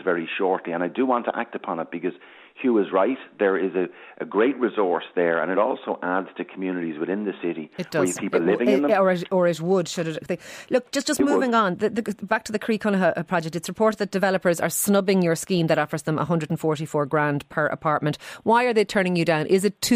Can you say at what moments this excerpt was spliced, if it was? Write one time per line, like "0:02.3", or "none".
none